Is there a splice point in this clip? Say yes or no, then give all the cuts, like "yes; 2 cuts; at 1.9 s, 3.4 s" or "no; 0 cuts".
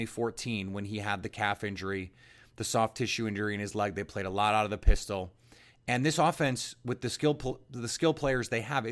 no; 0 cuts